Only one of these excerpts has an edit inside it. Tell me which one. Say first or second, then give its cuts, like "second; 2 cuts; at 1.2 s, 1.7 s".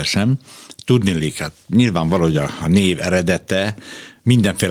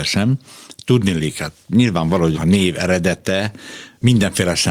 second; 1 cut; at 2.3 s